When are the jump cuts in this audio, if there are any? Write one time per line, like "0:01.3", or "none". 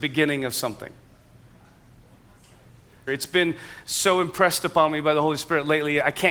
0:03.1